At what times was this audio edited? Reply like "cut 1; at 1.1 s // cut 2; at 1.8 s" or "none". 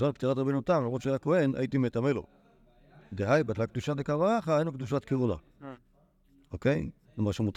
none